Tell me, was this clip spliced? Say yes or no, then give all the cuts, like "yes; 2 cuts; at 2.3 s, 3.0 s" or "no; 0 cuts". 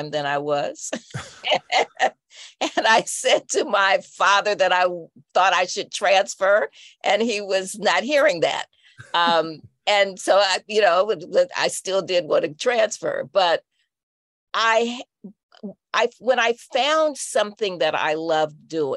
no; 0 cuts